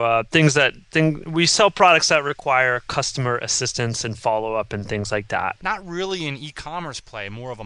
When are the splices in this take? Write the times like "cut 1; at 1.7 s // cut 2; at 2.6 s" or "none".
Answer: cut 1; at 5.6 s